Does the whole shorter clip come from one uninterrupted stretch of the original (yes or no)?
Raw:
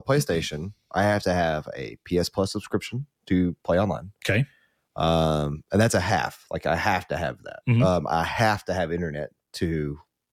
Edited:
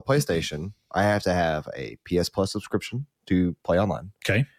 yes